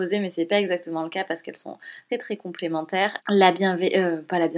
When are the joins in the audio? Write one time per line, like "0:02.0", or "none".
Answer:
0:02.1
0:03.2